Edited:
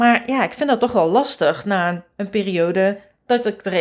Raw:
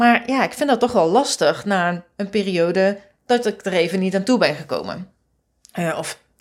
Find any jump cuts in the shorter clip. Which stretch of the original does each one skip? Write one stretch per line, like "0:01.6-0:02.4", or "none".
none